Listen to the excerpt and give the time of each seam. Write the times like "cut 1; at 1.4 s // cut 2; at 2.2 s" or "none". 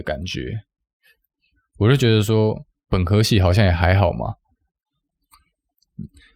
cut 1; at 2.8 s